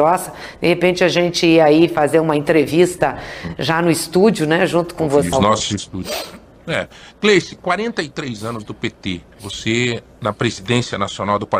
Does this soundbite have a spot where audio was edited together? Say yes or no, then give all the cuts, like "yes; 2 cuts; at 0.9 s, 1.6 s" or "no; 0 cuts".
yes; 1 cut; at 5.3 s